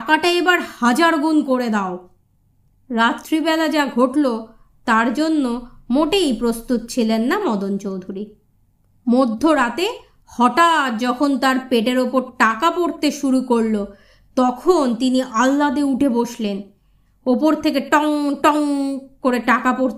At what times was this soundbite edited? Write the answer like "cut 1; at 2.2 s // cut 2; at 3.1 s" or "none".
cut 1; at 18.4 s